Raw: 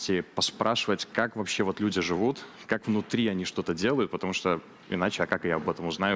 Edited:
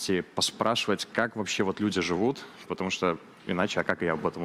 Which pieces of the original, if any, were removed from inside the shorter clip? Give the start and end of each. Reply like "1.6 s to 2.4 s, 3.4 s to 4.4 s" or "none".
2.7 s to 4.1 s